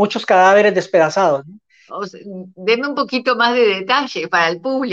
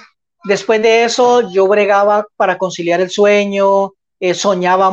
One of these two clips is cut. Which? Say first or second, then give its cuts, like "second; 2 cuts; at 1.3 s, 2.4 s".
first; 1 cut; at 1.9 s